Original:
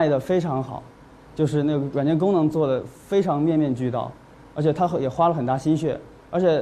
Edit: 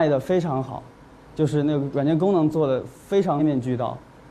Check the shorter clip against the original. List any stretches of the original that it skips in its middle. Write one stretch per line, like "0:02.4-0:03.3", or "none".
0:03.4-0:03.5

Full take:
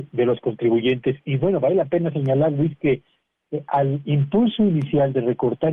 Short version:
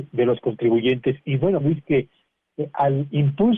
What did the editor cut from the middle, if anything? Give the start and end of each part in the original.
0:01.6-0:02.5

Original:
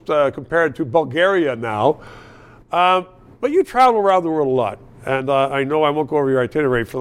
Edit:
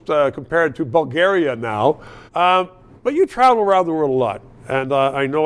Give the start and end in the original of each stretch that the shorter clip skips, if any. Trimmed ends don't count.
0:02.3-0:02.6

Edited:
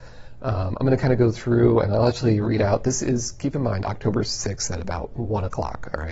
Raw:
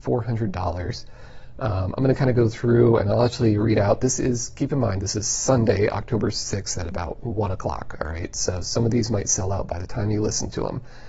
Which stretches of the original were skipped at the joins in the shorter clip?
0:05.0-0:05.9

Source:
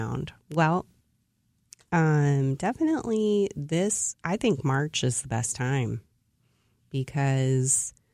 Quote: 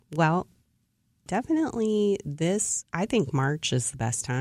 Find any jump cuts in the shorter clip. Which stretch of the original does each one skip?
0:01.6-0:02.6

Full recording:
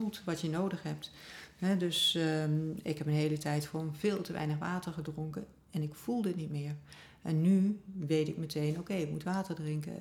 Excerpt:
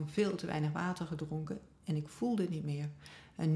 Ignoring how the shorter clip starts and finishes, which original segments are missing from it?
none

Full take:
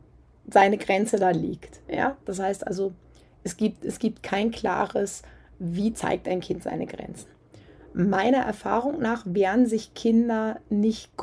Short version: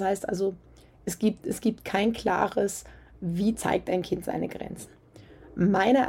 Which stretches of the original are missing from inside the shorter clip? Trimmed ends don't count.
none

